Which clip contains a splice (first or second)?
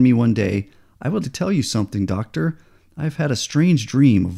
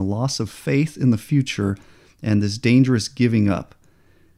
first